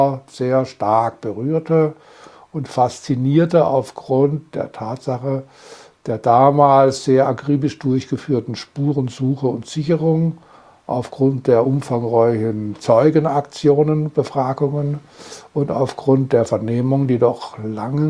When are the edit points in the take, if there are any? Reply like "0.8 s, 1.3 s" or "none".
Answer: none